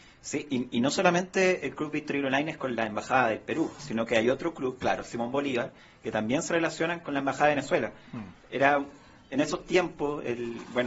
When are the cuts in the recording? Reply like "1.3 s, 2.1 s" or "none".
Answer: 4.8 s